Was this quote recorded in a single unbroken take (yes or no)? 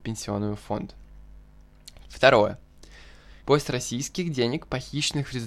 no